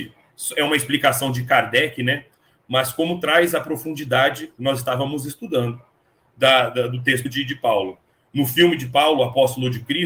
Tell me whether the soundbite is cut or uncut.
uncut